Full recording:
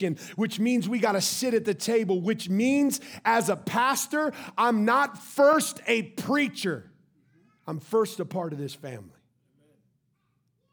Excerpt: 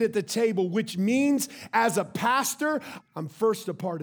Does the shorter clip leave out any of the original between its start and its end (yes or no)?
yes